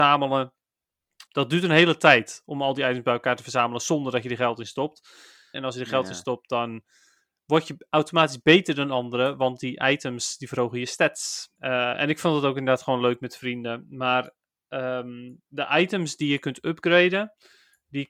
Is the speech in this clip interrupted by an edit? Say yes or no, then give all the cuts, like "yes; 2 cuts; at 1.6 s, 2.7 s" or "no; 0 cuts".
yes; 3 cuts; at 1.3 s, 5.5 s, 11.6 s